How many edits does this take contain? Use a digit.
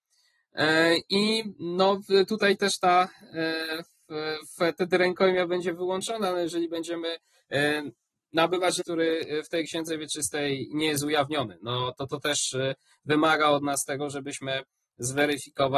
1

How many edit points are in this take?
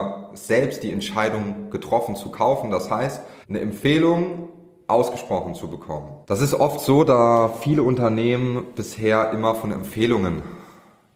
2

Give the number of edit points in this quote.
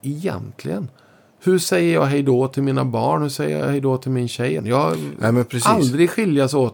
1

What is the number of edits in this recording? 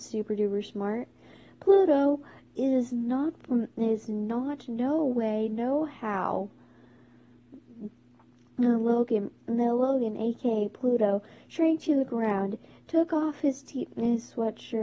0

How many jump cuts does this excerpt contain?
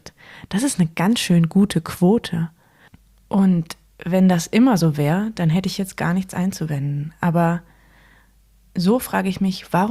0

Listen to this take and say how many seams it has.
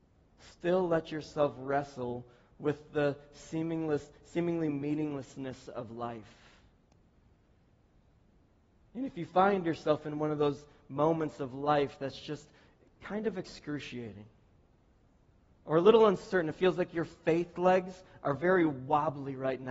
0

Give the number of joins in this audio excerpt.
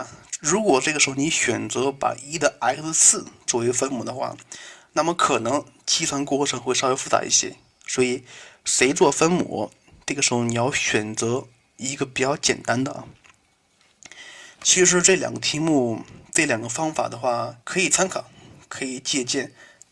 2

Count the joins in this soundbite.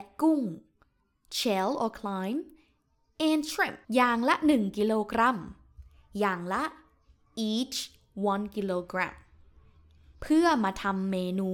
1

